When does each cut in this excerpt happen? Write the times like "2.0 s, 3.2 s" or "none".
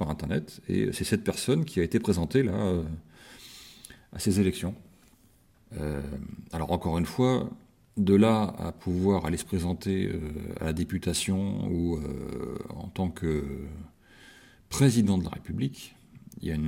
5.6 s